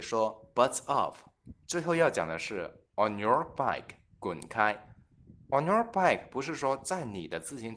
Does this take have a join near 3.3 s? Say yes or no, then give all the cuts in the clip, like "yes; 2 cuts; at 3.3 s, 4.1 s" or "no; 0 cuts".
no; 1 cut; at 1.6 s